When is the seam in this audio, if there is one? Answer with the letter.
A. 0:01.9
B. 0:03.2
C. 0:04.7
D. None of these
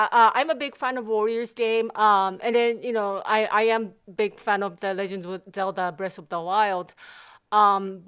A